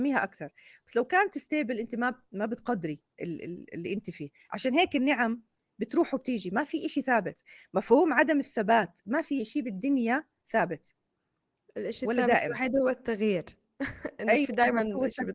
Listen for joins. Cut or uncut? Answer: uncut